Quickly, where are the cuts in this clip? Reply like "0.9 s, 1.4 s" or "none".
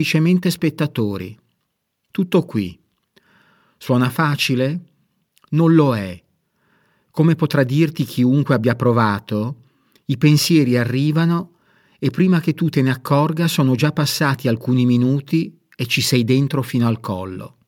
none